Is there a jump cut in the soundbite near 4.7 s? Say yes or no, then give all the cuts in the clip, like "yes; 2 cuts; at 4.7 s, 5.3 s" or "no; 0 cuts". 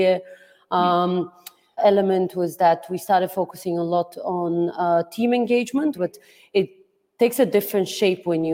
no; 2 cuts; at 1.8 s, 6.0 s